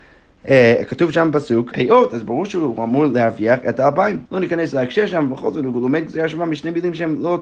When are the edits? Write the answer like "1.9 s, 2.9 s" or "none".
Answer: 1.7 s, 4.3 s